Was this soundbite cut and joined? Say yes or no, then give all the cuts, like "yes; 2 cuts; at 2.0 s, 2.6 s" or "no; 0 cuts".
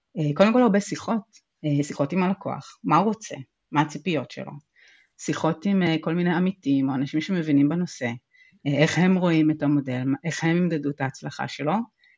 no; 0 cuts